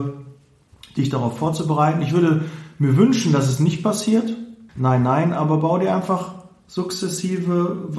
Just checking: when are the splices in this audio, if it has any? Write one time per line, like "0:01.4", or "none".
0:04.7